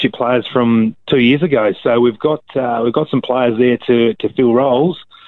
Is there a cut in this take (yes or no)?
no